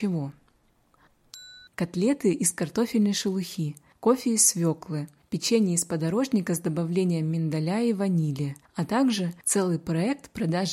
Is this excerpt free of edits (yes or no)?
no